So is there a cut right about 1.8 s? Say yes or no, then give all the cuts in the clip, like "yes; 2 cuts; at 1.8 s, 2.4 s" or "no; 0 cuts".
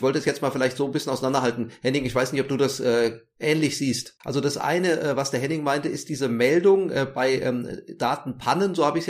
no; 1 cut; at 4.2 s